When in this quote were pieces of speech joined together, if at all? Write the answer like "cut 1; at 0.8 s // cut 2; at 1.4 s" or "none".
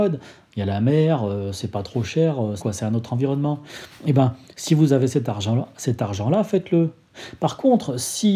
cut 1; at 2.6 s